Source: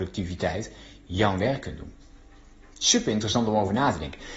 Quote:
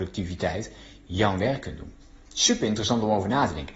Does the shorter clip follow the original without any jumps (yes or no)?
no